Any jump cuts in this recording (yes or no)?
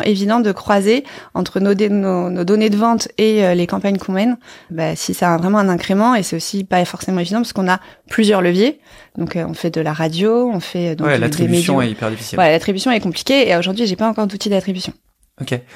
yes